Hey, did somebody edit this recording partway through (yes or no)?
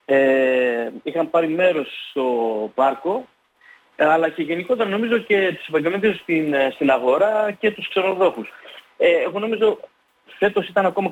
no